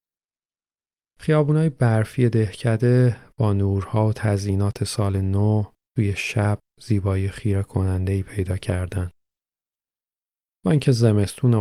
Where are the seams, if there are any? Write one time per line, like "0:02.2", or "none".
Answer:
none